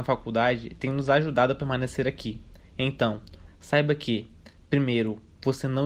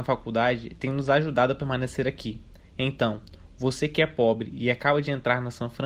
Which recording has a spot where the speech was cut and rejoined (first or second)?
first